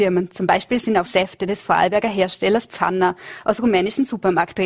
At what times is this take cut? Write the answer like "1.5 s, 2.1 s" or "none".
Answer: 1.1 s